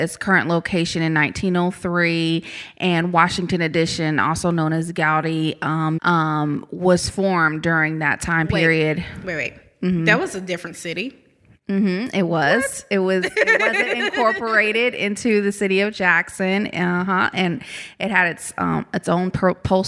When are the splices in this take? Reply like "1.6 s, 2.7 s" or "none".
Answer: 6.0 s